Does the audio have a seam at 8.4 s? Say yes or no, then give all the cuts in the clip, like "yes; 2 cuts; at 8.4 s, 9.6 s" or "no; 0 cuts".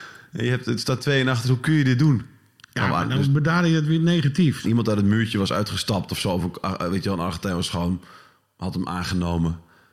no; 1 cut; at 4.6 s